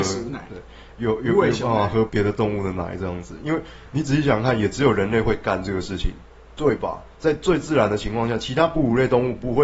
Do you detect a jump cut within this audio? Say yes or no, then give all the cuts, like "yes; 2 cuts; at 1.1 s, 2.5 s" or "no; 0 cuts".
yes; 1 cut; at 2.1 s